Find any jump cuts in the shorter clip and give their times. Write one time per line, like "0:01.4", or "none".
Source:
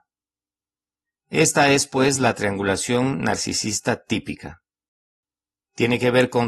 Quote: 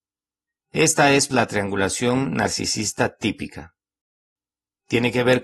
0:01.3